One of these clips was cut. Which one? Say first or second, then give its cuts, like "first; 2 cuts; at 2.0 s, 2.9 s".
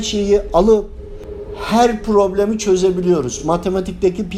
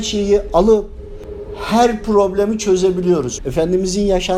second; 1 cut; at 3.4 s